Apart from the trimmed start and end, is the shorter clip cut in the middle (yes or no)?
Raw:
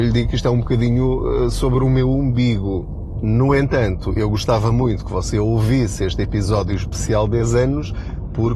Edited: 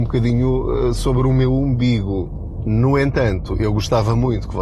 no